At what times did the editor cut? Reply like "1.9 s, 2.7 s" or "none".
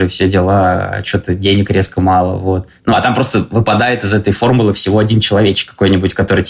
none

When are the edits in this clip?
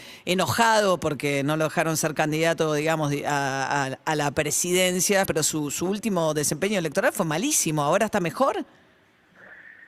5.3 s

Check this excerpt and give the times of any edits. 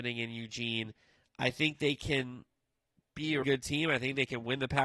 3.4 s

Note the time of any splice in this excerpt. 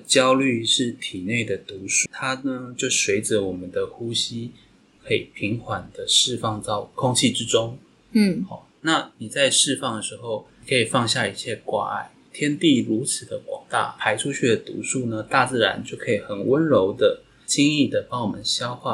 2.1 s

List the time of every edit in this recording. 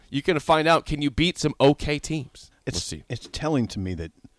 2.5 s

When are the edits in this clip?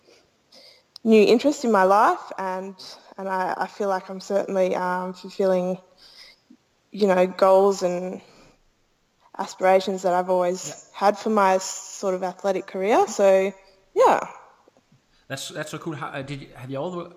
none

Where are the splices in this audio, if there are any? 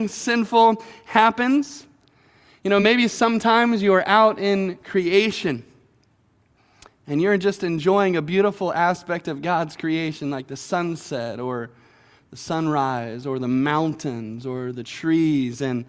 none

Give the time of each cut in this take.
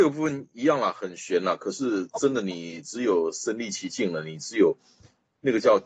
none

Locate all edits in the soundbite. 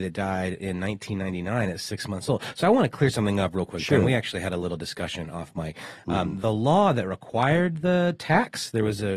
none

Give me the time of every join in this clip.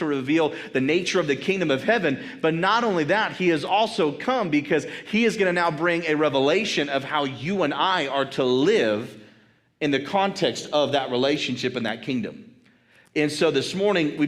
none

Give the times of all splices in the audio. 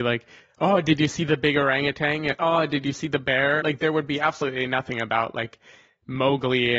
3.6 s

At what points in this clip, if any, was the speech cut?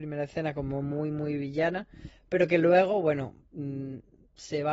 none

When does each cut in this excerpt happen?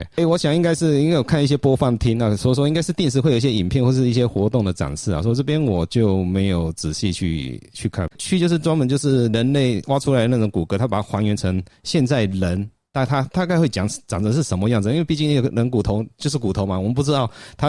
8.1 s

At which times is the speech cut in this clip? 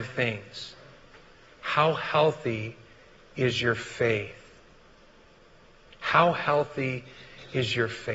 none

